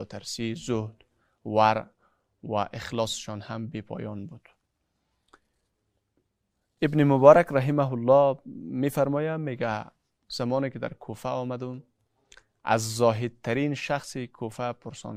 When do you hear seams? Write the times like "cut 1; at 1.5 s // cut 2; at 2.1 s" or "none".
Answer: none

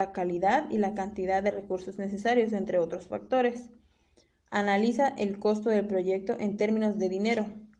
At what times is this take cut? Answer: none

